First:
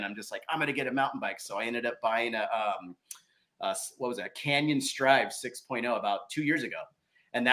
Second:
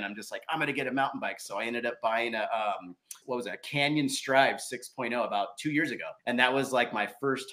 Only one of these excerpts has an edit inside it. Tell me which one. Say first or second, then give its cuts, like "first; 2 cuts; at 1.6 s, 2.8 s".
second; 2 cuts; at 3.2 s, 6.2 s